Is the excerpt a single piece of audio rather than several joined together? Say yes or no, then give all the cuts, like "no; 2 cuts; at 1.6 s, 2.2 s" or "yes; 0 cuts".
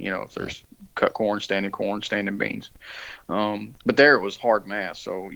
yes; 0 cuts